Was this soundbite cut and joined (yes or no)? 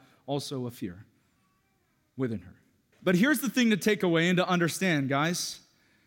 yes